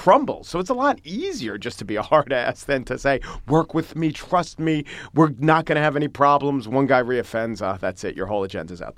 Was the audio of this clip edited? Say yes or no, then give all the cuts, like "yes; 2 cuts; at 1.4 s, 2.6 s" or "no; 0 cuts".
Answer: no; 0 cuts